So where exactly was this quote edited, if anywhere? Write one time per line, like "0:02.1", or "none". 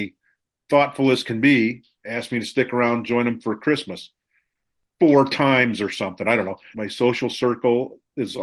0:06.7